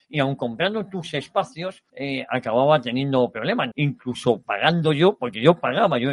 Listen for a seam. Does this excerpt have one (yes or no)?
yes